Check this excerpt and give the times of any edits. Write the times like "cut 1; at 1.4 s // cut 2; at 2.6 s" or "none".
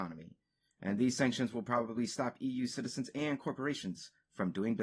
none